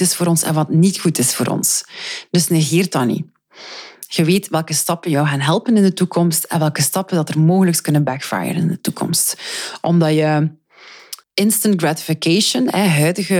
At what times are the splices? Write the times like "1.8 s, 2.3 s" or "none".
11.2 s

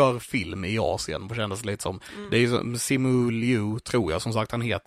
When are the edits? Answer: none

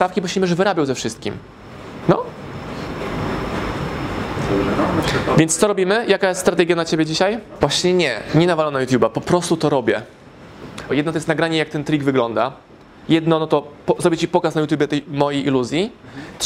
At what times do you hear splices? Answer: 7.6 s, 10.9 s

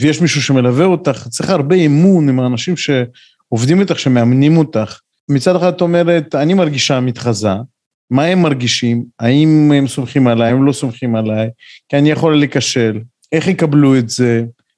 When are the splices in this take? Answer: none

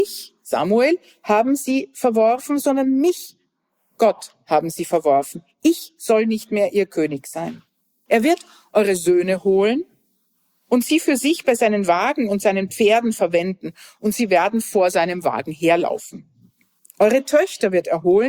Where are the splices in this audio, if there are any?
8.1 s

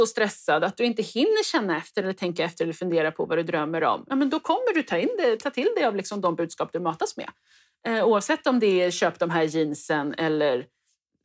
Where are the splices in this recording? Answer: none

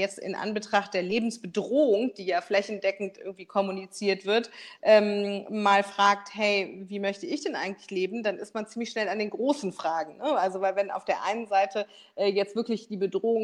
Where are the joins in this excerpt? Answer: none

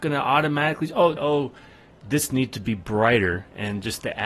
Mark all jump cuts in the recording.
1.2 s

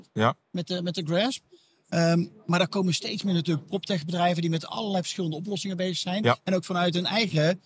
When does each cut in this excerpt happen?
none

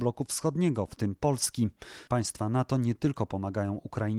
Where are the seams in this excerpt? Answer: 2.1 s

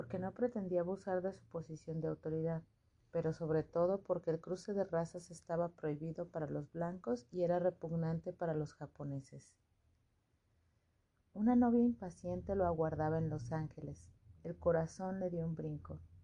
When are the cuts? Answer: 11.2 s, 14.4 s

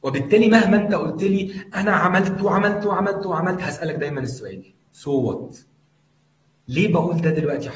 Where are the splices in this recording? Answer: none

